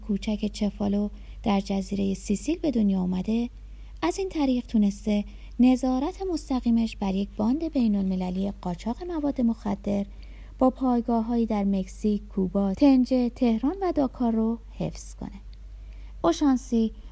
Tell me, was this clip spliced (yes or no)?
yes